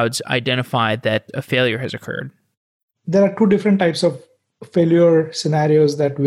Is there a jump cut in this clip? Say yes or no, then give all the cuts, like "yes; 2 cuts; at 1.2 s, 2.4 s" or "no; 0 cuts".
no; 0 cuts